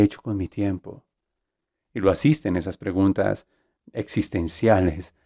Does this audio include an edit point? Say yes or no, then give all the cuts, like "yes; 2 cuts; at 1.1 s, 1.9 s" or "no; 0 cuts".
no; 0 cuts